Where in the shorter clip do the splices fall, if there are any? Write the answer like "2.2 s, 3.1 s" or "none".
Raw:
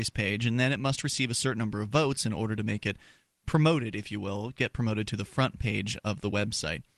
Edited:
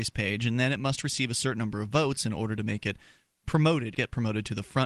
3.9 s